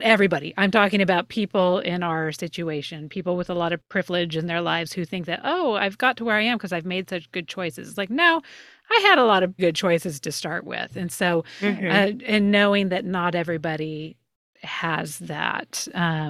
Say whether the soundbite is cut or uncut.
cut